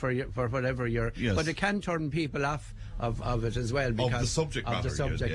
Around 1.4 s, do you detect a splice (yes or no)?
no